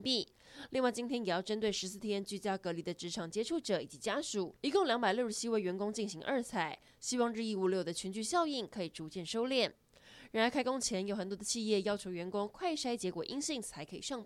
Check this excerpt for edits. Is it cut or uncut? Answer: uncut